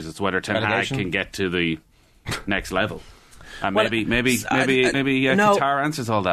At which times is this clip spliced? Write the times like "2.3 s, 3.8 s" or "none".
4.9 s